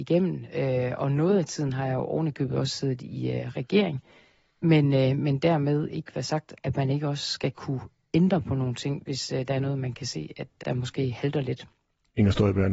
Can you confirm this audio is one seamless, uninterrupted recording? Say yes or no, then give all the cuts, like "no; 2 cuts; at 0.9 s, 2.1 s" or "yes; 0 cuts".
no; 1 cut; at 10.6 s